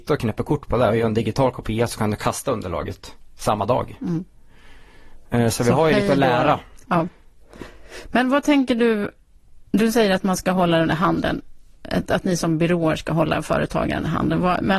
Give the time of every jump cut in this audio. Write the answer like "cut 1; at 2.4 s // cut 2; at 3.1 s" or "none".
cut 1; at 6.8 s